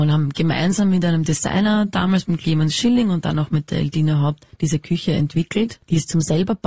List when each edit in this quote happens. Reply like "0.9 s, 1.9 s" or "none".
none

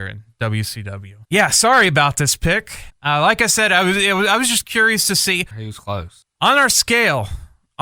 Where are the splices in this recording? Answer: 2.9 s, 5.5 s

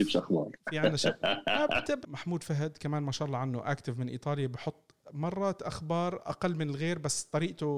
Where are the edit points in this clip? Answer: 2.0 s

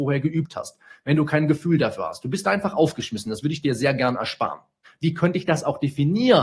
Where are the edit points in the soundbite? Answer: 4.8 s

